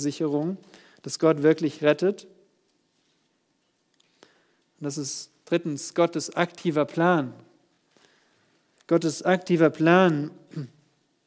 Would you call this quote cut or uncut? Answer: uncut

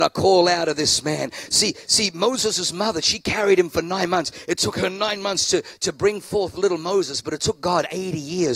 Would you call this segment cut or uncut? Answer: uncut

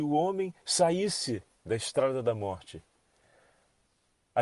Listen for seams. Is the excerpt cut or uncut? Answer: uncut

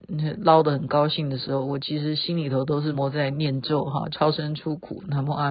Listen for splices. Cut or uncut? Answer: cut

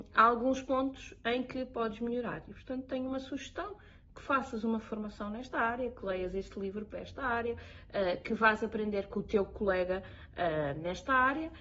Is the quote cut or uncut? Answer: uncut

